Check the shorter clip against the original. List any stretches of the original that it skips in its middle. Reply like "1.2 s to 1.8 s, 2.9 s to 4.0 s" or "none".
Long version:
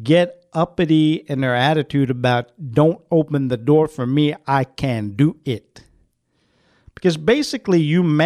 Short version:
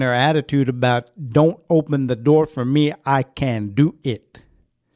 none